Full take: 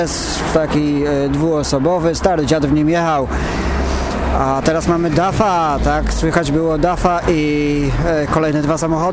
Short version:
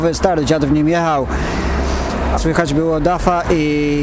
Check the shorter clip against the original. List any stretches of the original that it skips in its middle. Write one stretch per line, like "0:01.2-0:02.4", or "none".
0:04.4-0:06.1